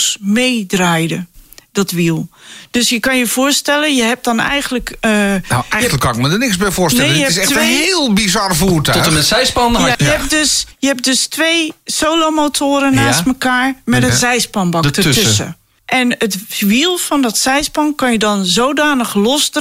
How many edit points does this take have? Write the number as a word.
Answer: two